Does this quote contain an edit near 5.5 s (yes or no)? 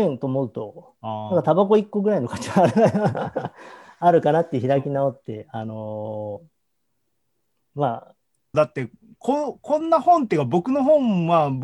no